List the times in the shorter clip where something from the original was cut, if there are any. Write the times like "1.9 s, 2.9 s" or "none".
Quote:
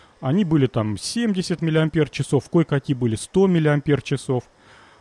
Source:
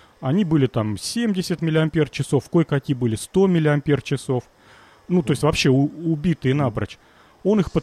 none

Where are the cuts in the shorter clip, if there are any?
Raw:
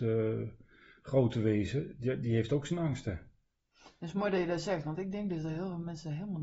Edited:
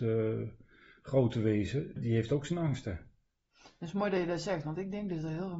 2.0 s

